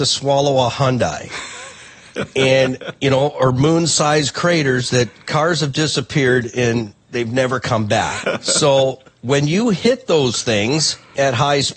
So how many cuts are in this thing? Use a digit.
1